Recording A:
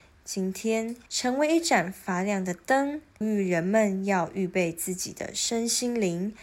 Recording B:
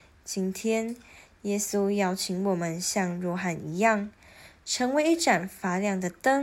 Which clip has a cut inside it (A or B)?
A